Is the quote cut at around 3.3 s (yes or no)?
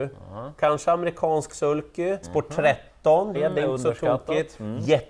yes